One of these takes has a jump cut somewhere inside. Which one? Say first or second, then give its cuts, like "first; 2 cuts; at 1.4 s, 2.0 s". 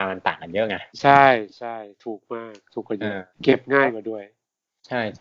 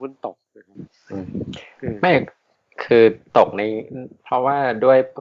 first; 2 cuts; at 0.9 s, 3.3 s